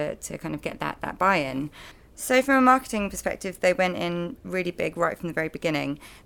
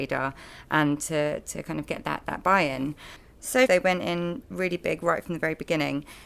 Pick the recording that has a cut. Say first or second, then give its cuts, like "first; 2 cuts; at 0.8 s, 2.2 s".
second; 1 cut; at 3.7 s